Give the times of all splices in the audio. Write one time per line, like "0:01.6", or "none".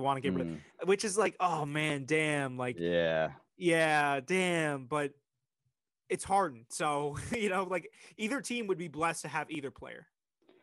none